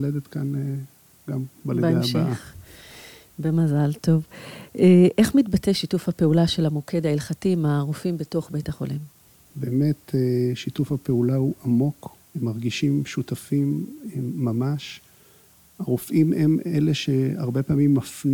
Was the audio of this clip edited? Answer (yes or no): yes